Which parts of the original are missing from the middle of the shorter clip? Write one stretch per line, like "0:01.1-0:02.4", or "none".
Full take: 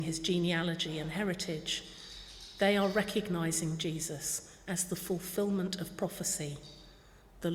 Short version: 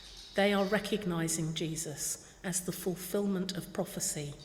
none